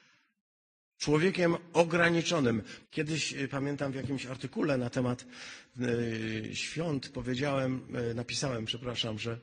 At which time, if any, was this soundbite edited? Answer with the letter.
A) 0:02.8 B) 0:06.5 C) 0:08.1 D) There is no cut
A